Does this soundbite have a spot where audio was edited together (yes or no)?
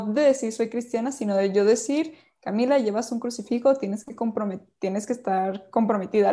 no